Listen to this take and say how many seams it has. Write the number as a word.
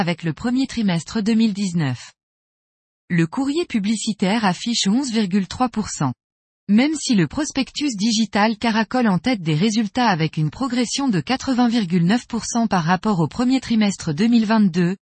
zero